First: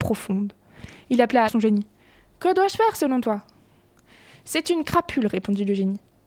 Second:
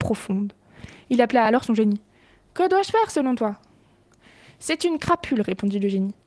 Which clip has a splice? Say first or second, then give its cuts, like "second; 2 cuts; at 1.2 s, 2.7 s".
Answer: first; 1 cut; at 1.5 s